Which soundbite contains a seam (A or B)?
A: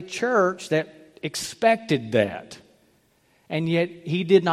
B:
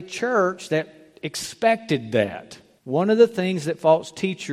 B